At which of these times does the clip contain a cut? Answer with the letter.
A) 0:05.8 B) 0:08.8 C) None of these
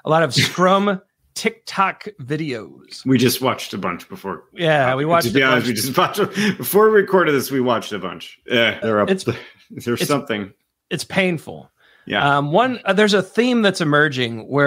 B